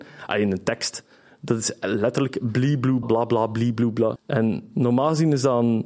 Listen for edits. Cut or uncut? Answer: cut